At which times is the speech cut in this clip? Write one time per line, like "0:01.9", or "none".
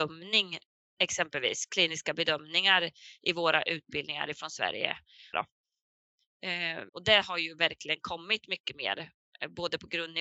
0:05.3
0:06.9